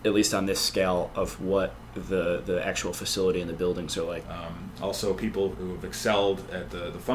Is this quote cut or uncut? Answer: cut